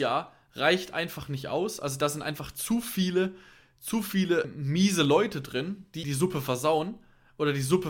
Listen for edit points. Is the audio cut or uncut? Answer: cut